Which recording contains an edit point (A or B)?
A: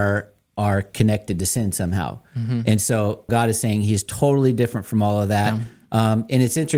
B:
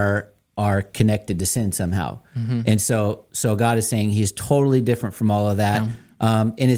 A